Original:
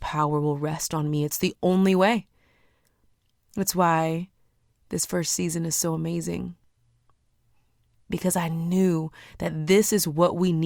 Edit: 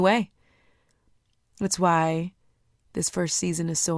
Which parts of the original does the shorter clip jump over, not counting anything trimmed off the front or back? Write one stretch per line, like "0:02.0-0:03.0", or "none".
none

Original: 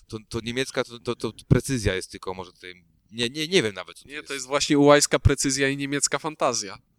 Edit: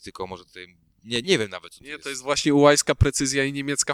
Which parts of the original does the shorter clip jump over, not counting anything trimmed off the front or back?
0:03.3-0:03.5

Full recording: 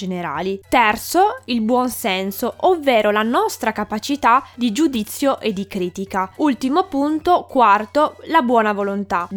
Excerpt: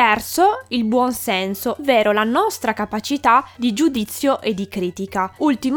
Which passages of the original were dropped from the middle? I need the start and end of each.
0:02.6-0:02.8

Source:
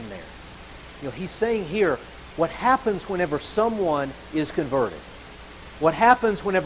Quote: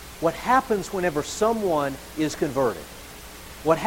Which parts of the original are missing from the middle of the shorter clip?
none

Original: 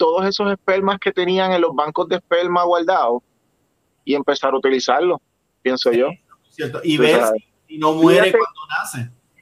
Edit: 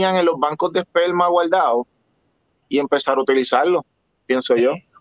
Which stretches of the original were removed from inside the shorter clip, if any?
none

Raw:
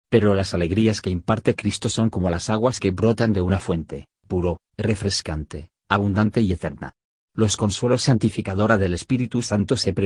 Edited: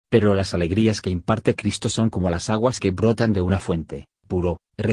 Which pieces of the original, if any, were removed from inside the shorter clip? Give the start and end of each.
none

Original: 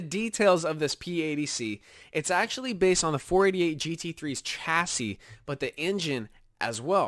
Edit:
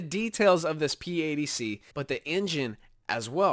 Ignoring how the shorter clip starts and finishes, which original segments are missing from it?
0:01.9-0:05.4

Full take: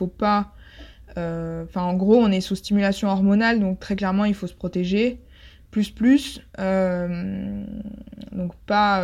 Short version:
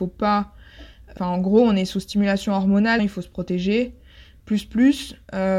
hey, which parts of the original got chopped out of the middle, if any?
0:01.2-0:01.7
0:03.5-0:04.2

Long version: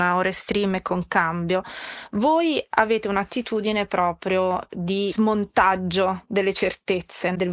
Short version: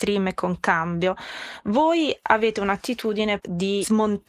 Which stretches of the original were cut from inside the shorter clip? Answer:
0:03.9-0:04.7

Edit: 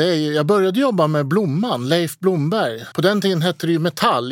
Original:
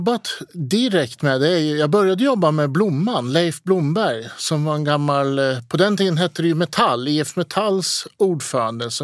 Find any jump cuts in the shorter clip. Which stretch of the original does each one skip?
0:04.4-0:05.7

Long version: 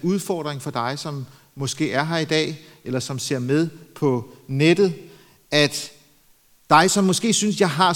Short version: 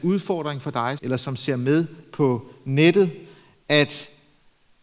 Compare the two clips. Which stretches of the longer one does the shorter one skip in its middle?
0:01.0-0:02.8

